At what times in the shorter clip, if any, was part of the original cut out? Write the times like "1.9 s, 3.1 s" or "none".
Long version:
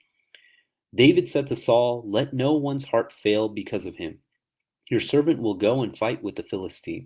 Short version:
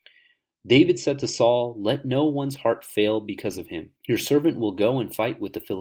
4.0 s

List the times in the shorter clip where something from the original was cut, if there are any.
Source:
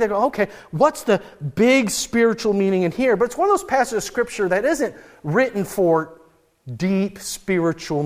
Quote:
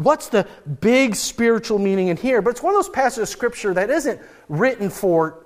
none

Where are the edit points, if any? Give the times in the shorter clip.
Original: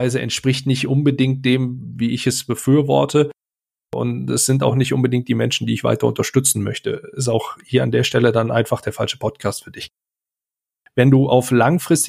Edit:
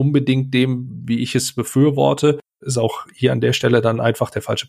2.6 s

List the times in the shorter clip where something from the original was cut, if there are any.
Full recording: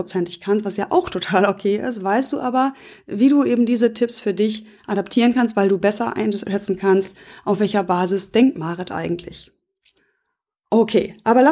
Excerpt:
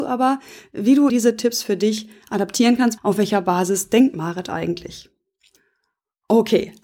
1.1 s, 3.0 s

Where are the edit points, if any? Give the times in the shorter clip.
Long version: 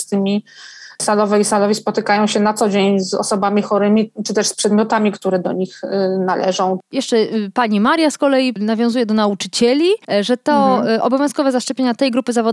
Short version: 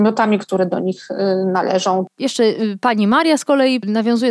none

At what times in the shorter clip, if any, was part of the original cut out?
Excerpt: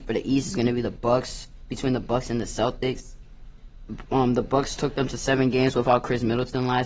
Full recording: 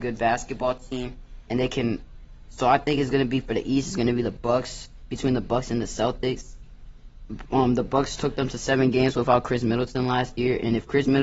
none

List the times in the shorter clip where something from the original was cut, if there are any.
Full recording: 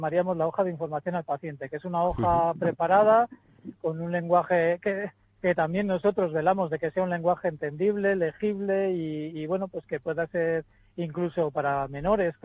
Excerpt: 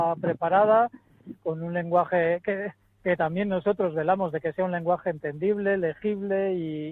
none

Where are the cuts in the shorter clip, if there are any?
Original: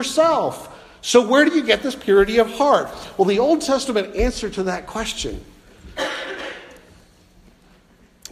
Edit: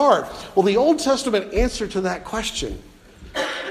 none

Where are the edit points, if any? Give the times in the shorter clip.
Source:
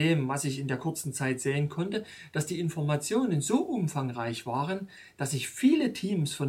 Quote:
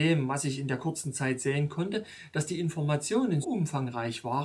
3.4 s

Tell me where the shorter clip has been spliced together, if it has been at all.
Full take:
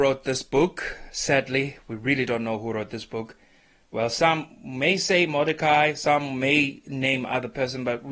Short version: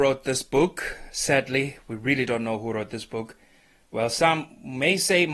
none

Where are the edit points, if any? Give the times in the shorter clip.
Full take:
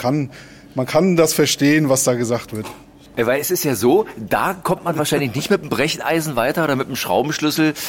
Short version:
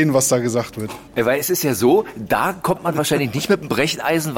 1.1 s

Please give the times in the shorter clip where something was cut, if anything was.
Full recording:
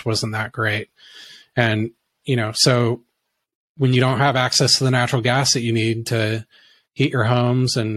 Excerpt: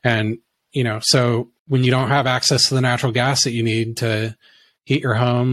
1.6 s

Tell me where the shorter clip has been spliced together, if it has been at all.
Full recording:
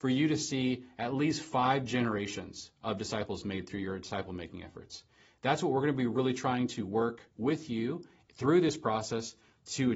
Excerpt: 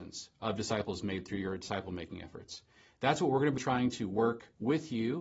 3.6 s

